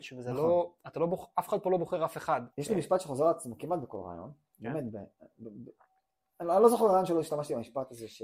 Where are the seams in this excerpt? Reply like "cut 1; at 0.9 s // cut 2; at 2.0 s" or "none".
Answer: cut 1; at 2.5 s